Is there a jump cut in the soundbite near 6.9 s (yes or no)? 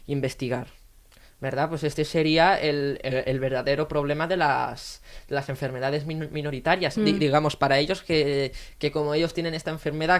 yes